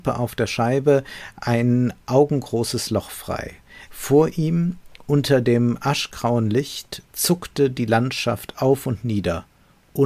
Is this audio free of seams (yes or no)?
no